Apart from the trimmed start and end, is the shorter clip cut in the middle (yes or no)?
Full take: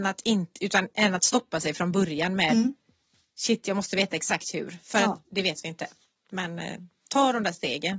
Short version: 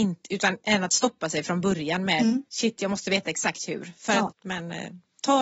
yes